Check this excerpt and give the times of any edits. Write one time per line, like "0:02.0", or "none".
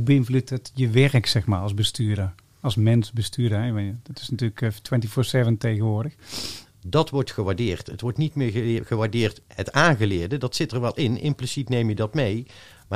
0:06.7

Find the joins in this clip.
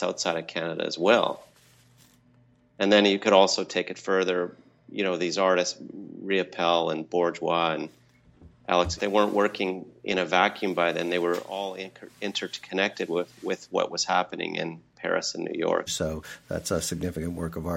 0:09.0
0:15.9

